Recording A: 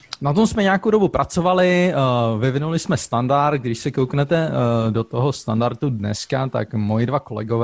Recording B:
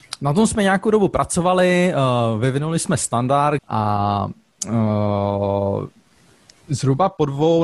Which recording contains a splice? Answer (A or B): B